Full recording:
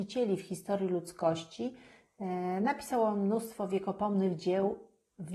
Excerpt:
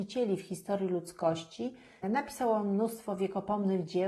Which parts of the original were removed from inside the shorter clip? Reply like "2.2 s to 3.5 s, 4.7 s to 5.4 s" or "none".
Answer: 2.0 s to 2.5 s